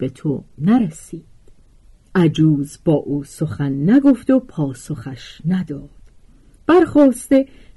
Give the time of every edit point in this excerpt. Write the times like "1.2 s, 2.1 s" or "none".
none

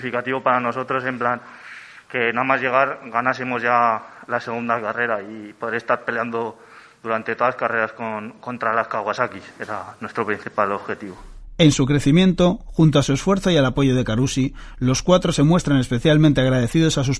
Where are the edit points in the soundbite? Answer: none

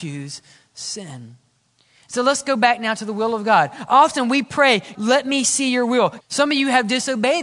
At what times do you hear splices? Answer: 4.9 s, 6.2 s

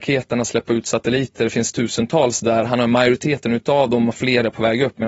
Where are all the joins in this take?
none

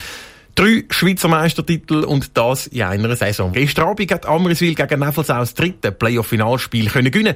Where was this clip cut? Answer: 3.5 s

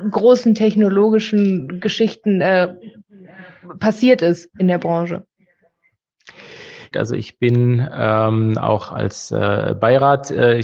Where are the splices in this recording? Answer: 6.9 s

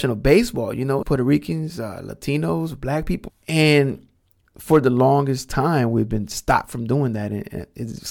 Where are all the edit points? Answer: 1.0 s, 3.3 s

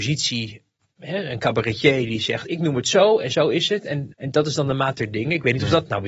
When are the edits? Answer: 4.1 s

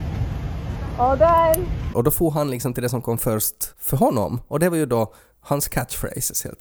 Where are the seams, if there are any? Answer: 1.9 s, 3.7 s

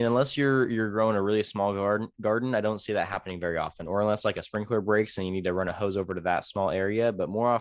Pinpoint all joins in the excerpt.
none

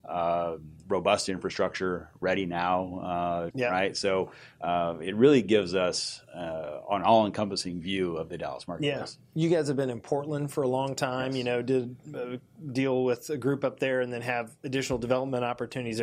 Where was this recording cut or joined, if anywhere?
3.5 s

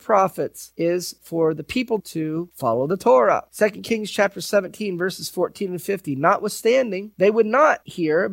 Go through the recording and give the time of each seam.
2.0 s

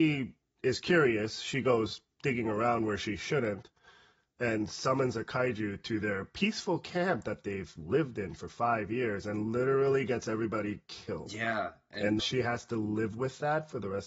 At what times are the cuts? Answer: 12.2 s

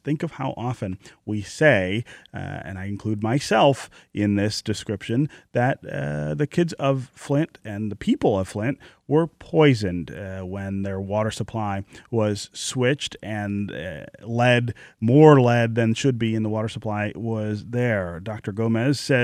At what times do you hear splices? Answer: none

